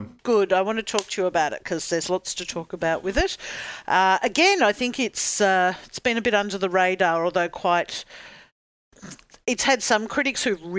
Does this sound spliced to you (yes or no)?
no